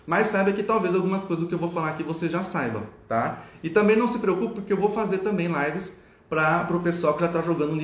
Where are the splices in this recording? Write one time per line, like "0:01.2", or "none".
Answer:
none